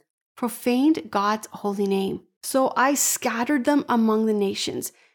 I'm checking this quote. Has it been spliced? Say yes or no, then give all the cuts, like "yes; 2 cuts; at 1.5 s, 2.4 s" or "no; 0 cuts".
yes; 1 cut; at 2.4 s